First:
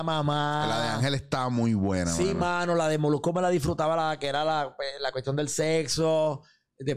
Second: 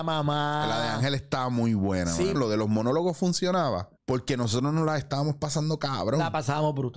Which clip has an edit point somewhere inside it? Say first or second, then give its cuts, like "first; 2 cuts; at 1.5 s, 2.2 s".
second; 2 cuts; at 2.4 s, 4.0 s